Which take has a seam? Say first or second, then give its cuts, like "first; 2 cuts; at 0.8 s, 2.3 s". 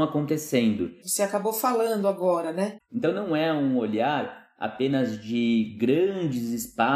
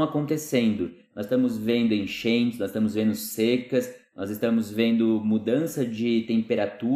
first; 2 cuts; at 1.0 s, 2.8 s